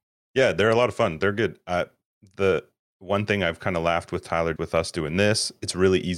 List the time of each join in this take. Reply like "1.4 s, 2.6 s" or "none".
4.6 s

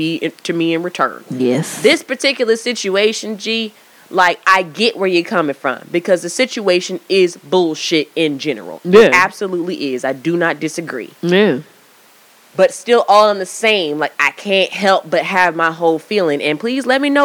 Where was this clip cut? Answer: none

